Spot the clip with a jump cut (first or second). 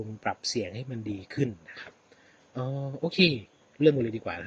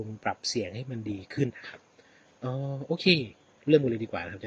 second